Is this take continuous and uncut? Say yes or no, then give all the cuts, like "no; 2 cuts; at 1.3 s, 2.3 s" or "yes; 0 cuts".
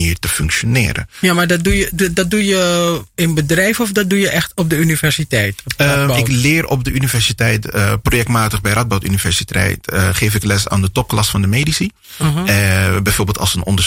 yes; 0 cuts